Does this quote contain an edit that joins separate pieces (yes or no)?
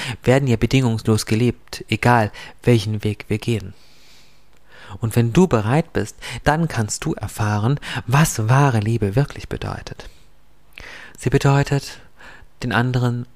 yes